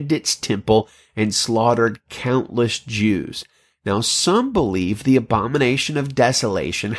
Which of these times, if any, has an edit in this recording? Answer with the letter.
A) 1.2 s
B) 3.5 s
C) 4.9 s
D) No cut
D